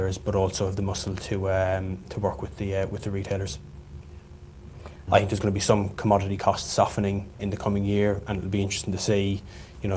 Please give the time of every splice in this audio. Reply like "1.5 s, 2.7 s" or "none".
5.1 s, 7.4 s